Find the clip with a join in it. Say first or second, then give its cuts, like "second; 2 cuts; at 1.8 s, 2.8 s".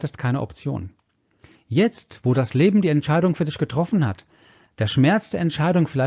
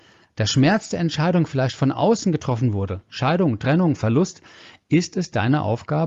second; 1 cut; at 3.1 s